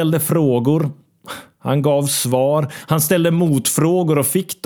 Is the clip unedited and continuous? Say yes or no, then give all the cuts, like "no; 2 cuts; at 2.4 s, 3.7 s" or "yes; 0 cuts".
yes; 0 cuts